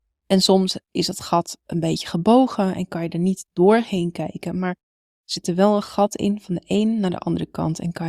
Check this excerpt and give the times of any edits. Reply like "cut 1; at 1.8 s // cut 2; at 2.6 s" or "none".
none